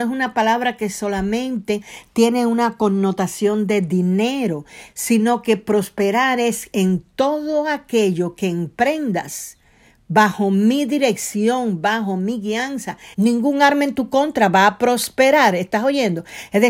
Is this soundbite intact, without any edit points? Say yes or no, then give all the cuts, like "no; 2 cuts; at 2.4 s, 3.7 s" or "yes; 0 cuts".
no; 1 cut; at 13.1 s